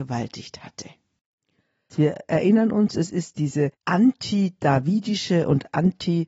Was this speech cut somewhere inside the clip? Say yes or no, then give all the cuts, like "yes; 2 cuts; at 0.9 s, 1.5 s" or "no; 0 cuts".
yes; 2 cuts; at 1.9 s, 3.7 s